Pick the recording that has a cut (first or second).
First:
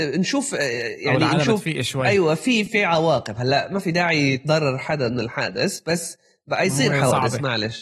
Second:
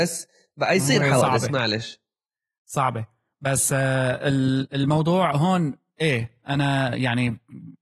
first